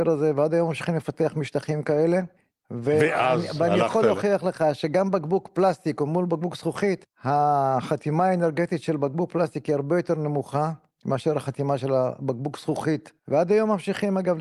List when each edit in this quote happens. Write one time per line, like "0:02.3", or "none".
0:13.2